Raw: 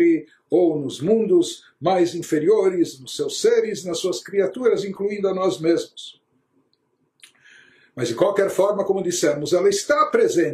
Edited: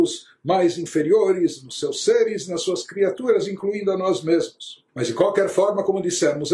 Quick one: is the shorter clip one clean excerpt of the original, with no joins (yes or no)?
no